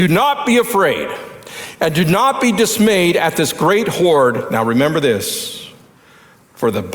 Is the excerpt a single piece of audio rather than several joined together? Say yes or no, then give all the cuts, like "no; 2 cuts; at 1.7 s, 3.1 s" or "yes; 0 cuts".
yes; 0 cuts